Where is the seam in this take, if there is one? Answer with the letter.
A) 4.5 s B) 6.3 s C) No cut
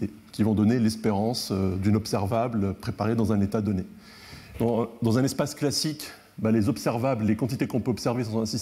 A